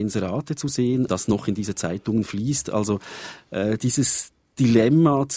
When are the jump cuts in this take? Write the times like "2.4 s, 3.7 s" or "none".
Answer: 1.1 s